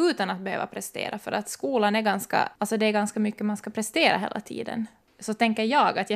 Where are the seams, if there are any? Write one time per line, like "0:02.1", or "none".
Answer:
0:02.6
0:05.1